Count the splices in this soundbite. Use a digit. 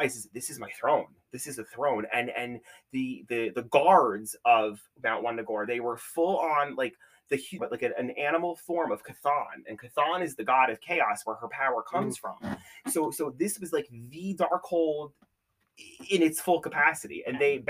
1